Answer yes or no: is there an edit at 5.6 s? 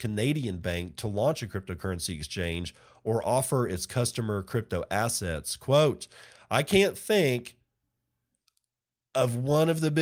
no